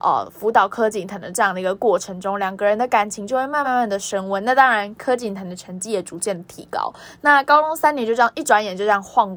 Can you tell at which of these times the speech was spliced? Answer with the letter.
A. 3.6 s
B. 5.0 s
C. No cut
A